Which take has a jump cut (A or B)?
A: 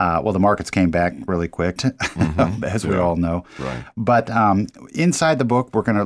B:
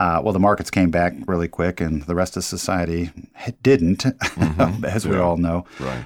A